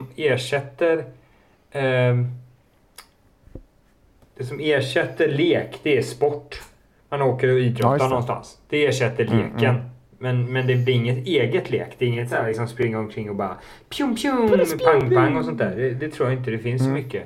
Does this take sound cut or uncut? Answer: uncut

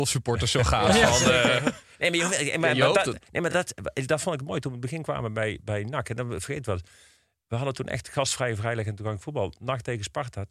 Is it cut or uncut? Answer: uncut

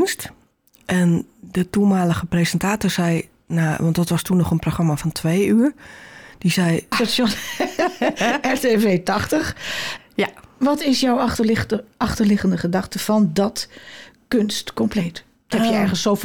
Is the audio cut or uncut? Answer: cut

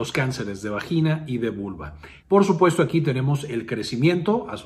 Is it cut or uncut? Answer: cut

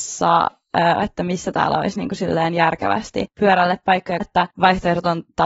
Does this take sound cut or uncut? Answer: cut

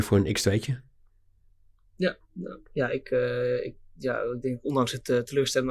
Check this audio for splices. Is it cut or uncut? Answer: cut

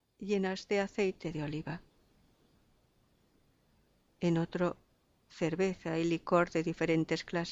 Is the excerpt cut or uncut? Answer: cut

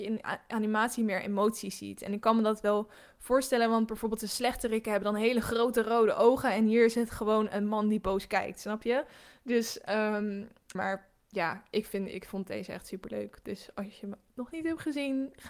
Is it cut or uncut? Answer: cut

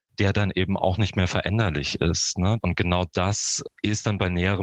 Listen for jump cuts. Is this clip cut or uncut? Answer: cut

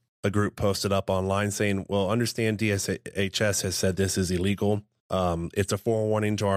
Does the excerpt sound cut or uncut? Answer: uncut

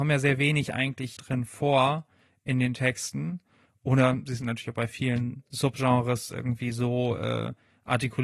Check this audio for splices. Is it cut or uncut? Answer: uncut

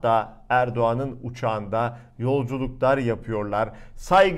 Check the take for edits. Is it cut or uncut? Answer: uncut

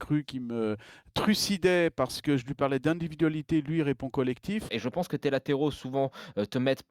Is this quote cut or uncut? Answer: cut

